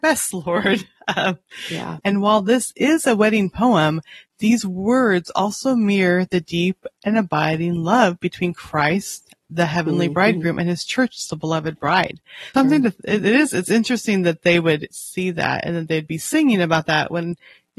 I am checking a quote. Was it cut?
yes; 3 cuts; at 2.0 s, 12.5 s, 14.9 s

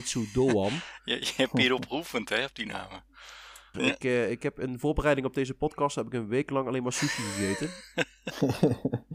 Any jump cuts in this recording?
yes; 1 cut; at 3.7 s

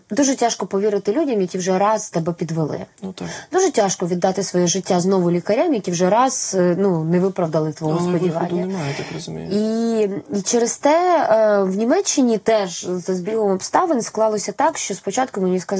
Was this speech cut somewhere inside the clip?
no; 0 cuts

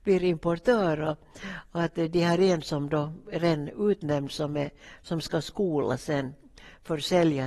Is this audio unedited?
yes; 0 cuts

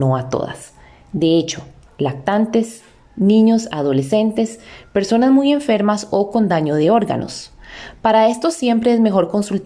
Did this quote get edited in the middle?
yes; 1 cut; at 1.9 s

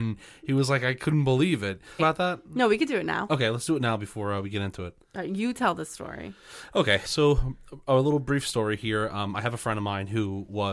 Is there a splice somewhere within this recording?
yes; 2 cuts; at 2.0 s, 7.0 s

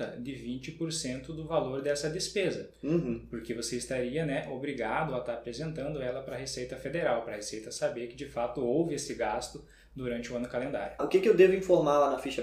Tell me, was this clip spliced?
yes; 1 cut; at 11.0 s

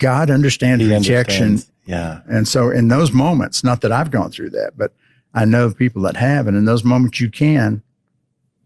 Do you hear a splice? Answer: yes; 1 cut; at 1.7 s

